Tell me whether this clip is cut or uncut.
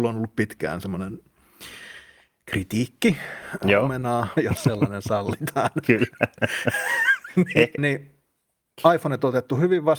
cut